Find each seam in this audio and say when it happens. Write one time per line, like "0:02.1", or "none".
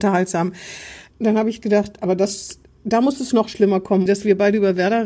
0:01.1
0:04.1

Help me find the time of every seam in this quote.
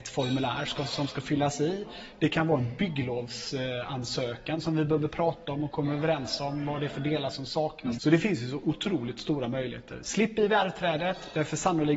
0:08.0

